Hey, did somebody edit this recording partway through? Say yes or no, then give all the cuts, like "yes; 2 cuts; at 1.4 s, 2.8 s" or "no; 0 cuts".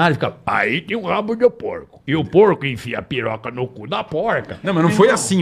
yes; 1 cut; at 2.0 s